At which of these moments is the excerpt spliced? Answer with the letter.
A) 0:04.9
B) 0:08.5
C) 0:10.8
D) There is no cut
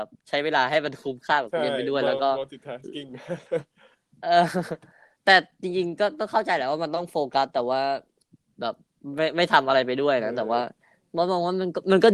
D